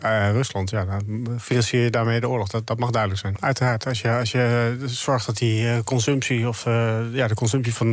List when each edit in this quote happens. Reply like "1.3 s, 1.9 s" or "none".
3.3 s